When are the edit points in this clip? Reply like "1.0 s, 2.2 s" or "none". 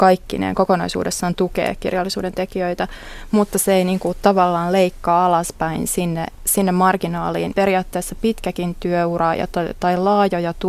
7.5 s